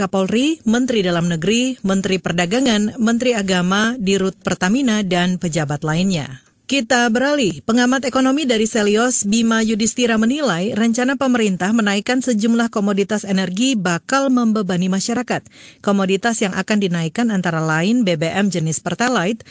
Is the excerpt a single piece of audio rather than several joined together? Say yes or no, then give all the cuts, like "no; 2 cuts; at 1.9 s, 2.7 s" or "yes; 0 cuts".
yes; 0 cuts